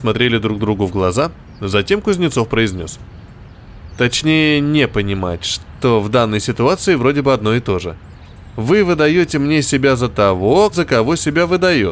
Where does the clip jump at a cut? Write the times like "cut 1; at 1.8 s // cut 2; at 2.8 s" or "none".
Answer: cut 1; at 3.9 s // cut 2; at 10.7 s